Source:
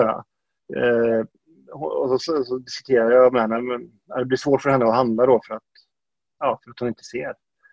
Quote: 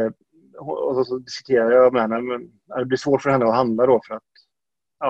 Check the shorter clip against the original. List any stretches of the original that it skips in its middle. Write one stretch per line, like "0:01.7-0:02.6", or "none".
0:02.2-0:02.4